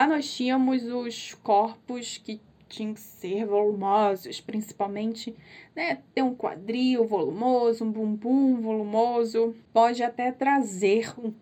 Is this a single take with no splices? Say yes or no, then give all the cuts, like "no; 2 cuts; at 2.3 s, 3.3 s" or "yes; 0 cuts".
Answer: no; 1 cut; at 9.6 s